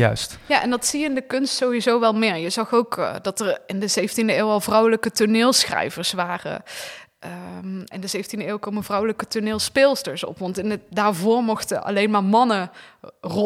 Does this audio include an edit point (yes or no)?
yes